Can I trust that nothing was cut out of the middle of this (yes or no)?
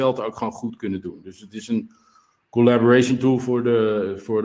yes